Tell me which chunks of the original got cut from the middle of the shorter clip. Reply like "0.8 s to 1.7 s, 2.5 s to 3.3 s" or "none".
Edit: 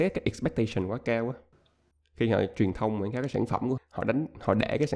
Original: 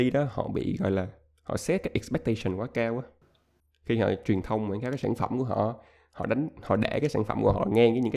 5.5 s to 6.0 s